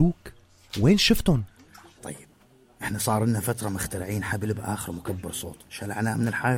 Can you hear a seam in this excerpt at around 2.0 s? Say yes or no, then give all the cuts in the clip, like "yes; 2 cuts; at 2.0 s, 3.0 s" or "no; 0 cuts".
yes; 1 cut; at 2.0 s